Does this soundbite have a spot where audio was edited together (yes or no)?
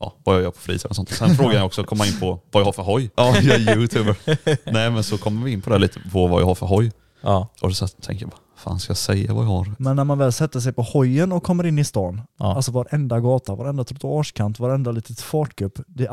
yes